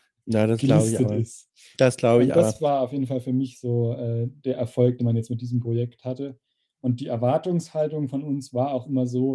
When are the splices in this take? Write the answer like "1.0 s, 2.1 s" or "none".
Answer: none